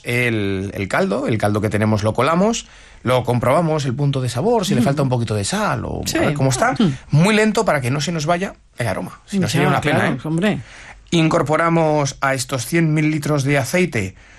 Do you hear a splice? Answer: yes; 1 cut; at 6.8 s

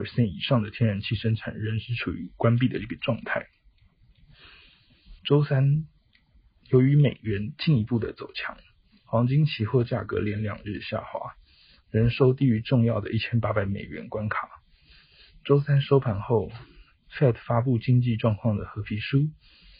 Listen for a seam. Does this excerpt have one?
yes; 1 cut; at 5.2 s

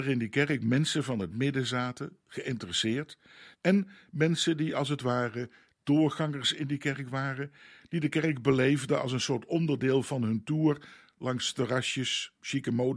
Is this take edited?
yes; 1 cut; at 3.5 s

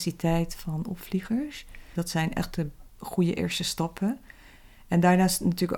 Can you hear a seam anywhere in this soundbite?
yes; 1 cut; at 1.9 s

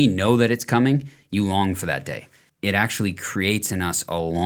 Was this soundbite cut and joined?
yes; 1 cut; at 2.5 s

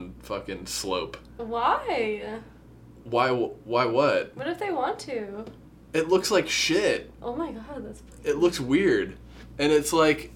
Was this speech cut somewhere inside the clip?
no; 0 cuts

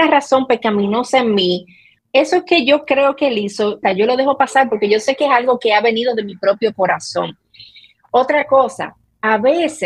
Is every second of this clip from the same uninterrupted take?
no; 2 cuts; at 2.0 s, 3.8 s

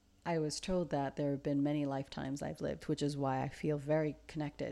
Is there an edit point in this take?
no; 0 cuts

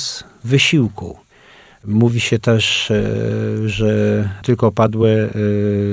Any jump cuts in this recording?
no; 0 cuts

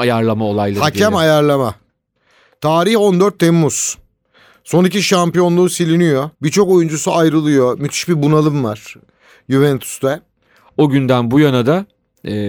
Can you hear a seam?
yes; 2 cuts; at 6.3 s, 10.7 s

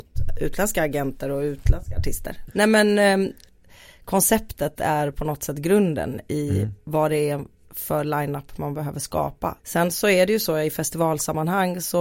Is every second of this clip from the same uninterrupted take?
no; 2 cuts; at 2.5 s, 9.6 s

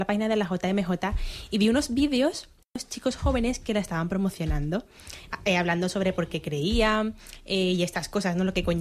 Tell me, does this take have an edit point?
no; 0 cuts

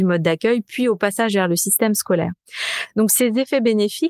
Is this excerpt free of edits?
yes; 0 cuts

